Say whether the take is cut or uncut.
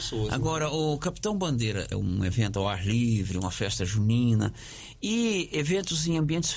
cut